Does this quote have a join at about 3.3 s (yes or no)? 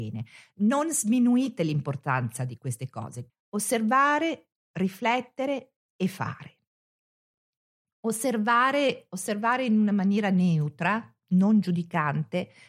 yes